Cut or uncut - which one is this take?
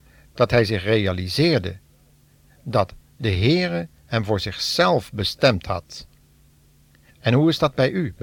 cut